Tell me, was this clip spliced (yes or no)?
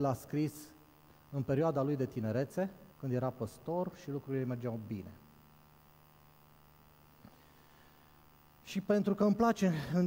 yes